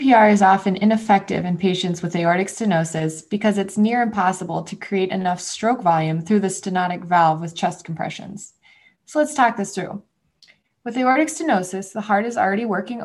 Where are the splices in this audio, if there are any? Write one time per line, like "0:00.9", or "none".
none